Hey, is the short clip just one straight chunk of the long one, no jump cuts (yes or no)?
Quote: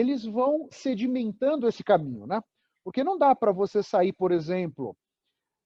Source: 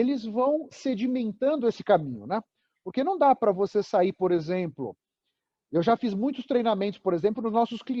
yes